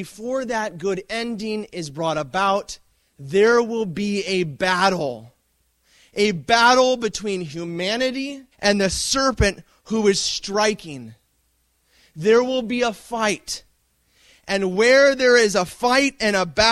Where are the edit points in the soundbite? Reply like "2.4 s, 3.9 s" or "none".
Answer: 8.5 s